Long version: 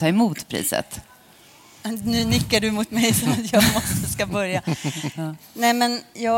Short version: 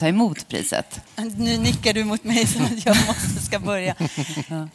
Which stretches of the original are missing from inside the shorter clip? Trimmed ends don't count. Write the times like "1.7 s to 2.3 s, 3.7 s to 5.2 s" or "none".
1.1 s to 1.7 s